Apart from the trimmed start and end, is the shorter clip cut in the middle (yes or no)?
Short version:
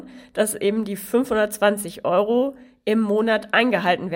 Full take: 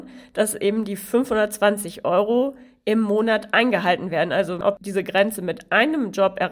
no